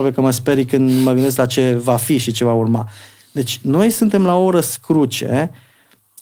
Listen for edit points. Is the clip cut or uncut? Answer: uncut